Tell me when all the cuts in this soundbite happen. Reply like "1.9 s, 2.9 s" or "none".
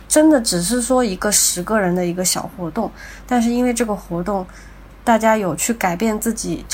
none